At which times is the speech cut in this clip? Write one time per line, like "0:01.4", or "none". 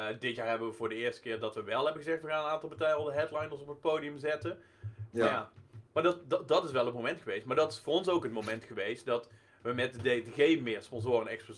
0:05.1